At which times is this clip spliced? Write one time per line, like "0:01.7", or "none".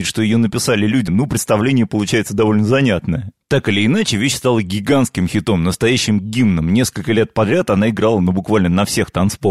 0:01.1